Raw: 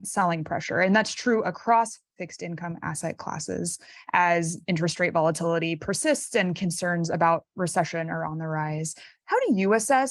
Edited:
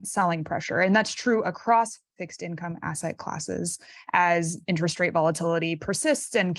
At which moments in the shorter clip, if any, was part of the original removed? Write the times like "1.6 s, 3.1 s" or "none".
none